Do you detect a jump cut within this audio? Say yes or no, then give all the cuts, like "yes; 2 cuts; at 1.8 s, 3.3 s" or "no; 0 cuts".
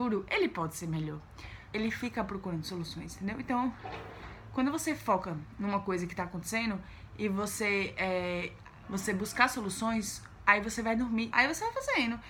yes; 3 cuts; at 1.7 s, 8.8 s, 11.3 s